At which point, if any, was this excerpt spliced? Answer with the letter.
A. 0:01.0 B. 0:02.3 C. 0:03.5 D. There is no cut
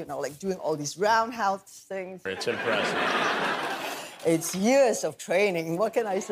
B